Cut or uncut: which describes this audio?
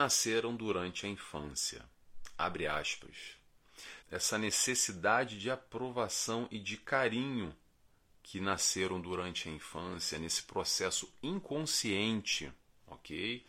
cut